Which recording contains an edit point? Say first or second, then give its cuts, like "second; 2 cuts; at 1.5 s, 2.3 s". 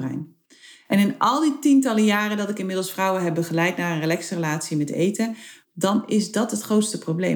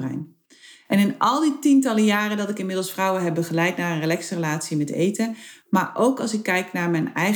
first; 1 cut; at 5.6 s